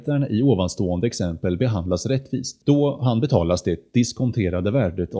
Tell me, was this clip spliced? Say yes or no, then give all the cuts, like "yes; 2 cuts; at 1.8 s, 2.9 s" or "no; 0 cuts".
yes; 1 cut; at 2.6 s